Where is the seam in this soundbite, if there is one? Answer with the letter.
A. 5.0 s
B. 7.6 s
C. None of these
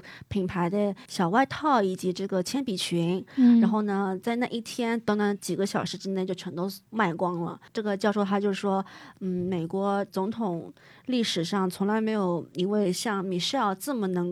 C